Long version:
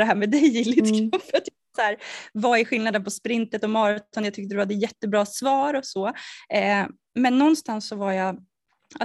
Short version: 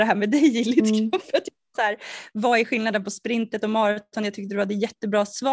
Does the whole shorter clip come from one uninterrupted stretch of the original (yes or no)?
yes